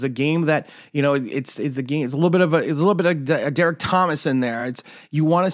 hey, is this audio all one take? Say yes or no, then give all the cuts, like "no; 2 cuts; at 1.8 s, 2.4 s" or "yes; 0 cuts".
yes; 0 cuts